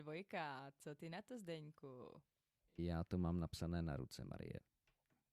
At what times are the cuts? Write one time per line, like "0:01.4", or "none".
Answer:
none